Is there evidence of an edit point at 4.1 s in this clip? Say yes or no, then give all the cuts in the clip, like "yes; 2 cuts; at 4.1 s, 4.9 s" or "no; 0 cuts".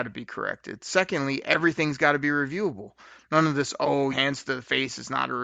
yes; 1 cut; at 4.1 s